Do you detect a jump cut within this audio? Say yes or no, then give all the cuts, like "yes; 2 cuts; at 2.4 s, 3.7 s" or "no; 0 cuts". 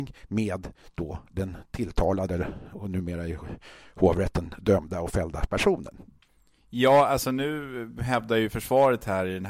no; 0 cuts